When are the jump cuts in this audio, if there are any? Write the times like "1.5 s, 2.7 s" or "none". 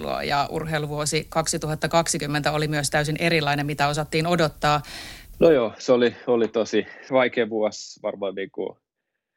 5.3 s, 7.1 s